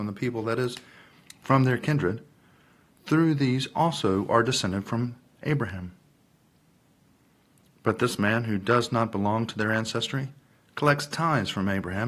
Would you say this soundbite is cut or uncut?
uncut